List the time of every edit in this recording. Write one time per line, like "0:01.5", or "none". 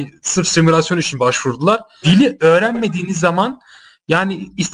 0:02.0

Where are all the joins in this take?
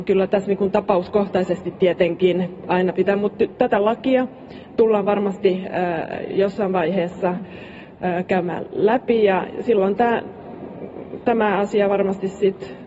none

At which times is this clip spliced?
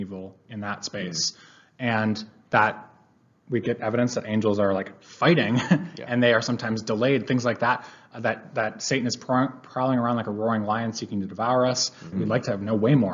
0:12.1

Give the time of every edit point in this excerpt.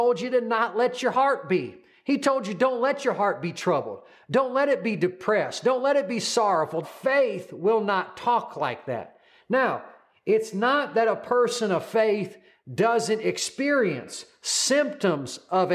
0:06.8

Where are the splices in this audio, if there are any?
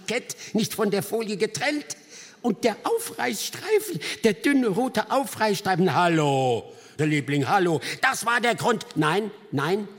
0:07.0
0:08.0

